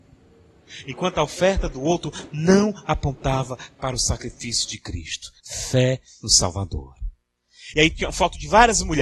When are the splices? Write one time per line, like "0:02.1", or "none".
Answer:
0:05.4
0:07.7